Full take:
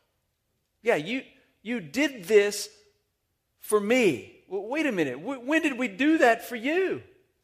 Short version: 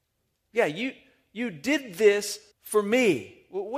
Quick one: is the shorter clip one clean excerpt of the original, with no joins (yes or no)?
no